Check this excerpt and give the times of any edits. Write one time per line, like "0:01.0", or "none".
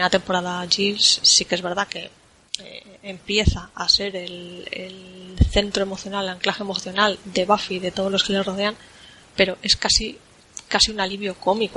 0:01.2